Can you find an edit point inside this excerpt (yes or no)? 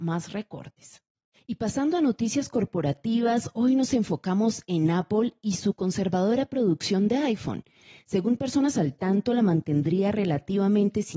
no